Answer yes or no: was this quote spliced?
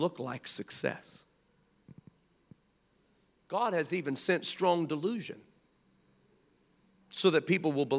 no